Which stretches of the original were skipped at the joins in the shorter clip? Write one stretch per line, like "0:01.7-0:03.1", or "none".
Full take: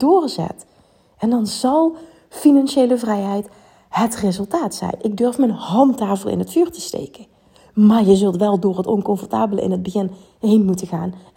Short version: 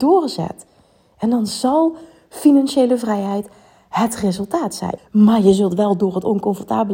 0:05.0-0:07.6